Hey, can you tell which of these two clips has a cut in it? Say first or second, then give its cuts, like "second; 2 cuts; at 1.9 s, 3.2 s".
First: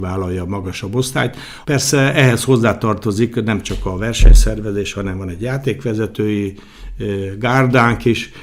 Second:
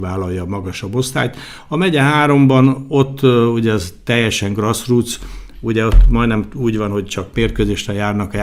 first; 1 cut; at 1.6 s